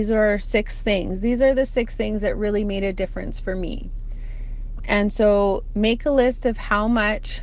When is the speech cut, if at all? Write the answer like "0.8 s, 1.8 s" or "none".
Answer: none